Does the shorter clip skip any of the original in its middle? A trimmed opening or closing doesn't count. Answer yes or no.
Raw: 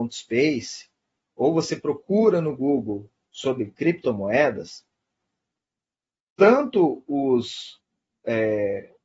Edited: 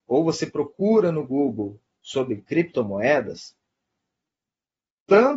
no